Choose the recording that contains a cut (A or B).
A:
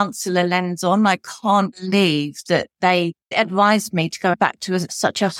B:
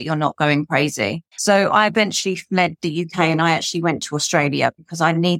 B